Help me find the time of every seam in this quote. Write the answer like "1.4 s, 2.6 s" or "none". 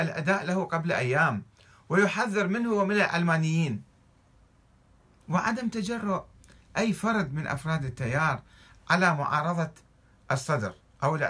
none